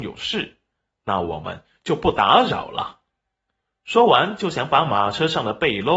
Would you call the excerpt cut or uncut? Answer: uncut